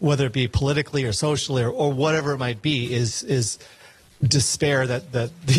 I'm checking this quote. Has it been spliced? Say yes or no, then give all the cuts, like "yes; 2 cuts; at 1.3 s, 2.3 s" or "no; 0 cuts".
no; 0 cuts